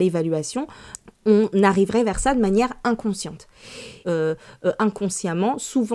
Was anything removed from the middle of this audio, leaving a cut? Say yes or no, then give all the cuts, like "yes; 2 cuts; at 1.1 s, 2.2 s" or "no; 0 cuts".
yes; 1 cut; at 4.0 s